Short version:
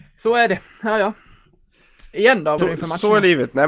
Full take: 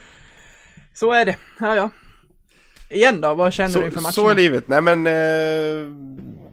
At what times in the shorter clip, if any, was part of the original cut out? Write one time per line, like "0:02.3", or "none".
0:02.6